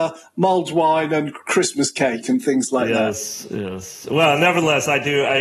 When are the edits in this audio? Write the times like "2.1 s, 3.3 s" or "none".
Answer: none